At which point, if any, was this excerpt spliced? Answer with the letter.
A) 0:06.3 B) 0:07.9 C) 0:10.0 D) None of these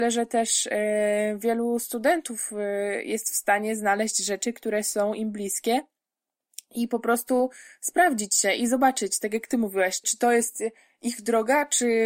C